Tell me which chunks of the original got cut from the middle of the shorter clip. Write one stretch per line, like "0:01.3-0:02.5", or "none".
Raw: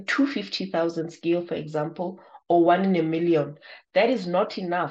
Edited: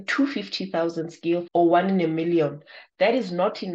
0:01.5-0:02.4